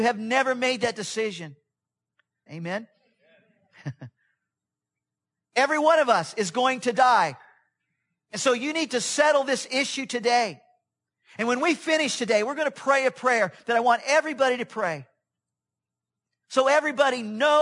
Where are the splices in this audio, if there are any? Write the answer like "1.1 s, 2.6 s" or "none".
2.5 s

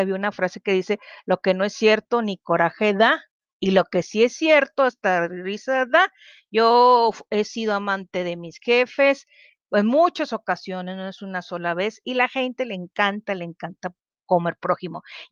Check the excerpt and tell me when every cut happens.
none

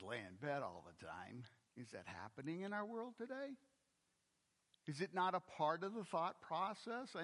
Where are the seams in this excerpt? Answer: 1.7 s

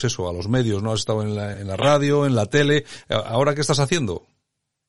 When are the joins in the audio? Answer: 1.5 s

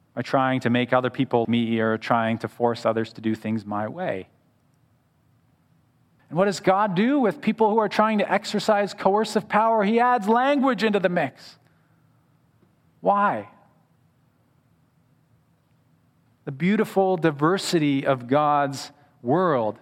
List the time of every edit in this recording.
1.4 s, 6.2 s

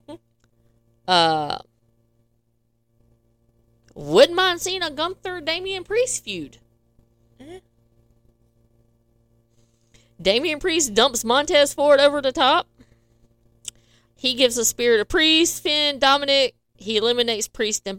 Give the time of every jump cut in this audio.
14.1 s

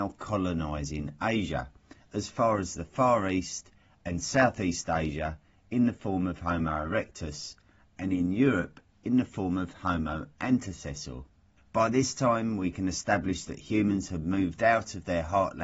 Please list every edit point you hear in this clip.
11.6 s

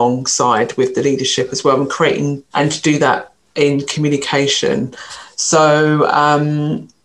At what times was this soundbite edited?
2.5 s

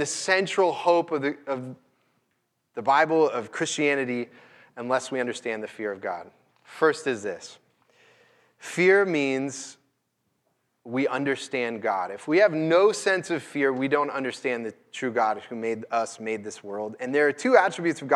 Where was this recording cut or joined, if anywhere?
6.5 s

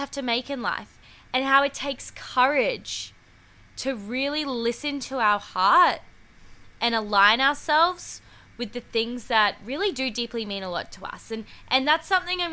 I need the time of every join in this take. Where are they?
none

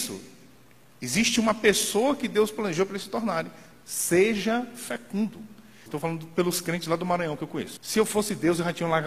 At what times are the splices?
5.9 s, 7.8 s

